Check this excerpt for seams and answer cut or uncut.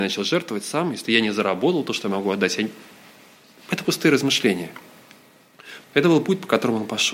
cut